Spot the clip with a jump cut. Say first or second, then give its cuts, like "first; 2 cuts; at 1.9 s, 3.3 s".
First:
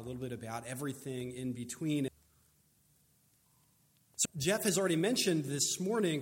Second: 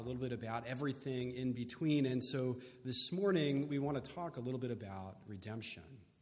first; 2 cuts; at 2.1 s, 4.2 s